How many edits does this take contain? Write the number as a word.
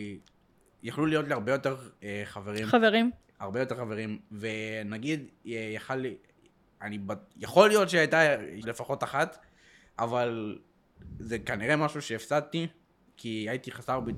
one